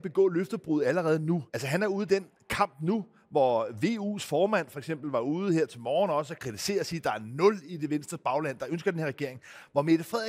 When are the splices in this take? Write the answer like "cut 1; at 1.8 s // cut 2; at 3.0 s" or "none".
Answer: cut 1; at 1.5 s